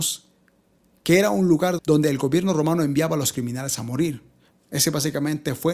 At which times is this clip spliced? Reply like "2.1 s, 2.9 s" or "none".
1.8 s, 4.5 s